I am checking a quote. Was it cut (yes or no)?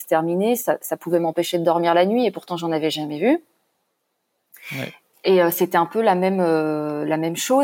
no